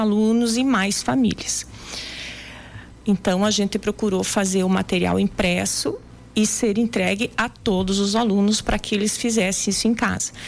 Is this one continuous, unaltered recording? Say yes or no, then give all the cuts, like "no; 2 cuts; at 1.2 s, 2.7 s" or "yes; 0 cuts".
no; 1 cut; at 3.0 s